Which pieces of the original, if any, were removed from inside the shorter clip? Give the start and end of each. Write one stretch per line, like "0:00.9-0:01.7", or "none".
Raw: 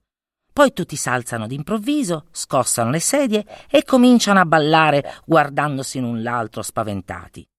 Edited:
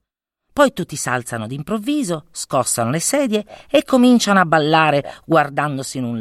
none